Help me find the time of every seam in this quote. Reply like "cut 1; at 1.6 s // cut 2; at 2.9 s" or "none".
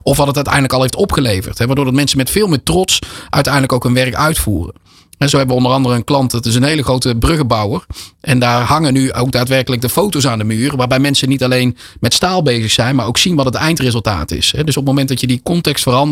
none